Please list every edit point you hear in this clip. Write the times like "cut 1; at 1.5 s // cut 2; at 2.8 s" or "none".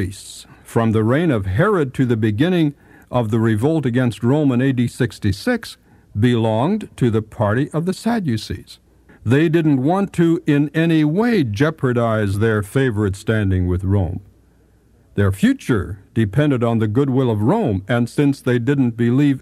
cut 1; at 9.1 s